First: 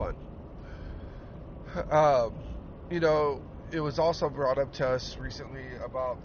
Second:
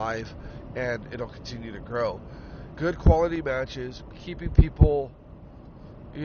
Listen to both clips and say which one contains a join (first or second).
second